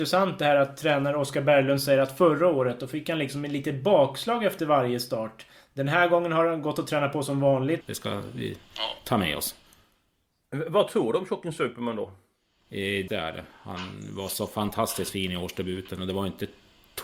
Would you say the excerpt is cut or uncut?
cut